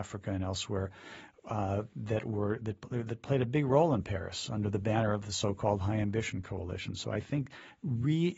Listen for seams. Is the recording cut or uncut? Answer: uncut